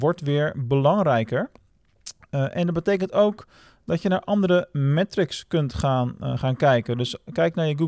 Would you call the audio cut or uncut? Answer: uncut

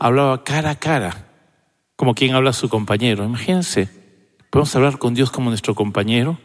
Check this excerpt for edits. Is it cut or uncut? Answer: uncut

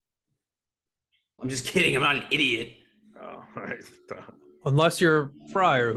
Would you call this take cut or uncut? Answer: cut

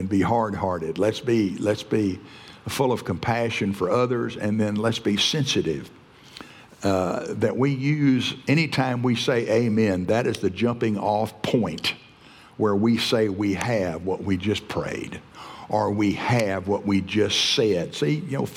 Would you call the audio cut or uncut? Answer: uncut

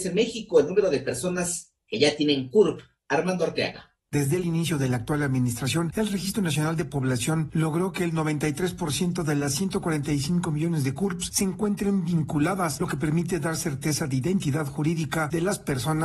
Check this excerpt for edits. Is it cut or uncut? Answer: uncut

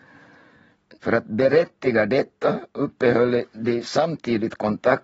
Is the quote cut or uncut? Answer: cut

